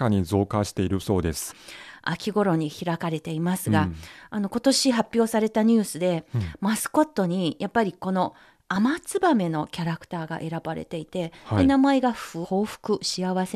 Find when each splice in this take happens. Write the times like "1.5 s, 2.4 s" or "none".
1.5 s, 12.4 s